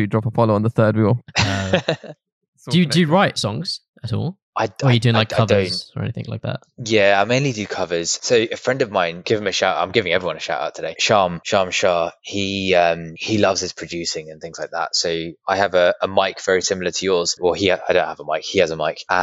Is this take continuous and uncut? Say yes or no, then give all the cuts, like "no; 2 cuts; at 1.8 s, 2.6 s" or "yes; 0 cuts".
yes; 0 cuts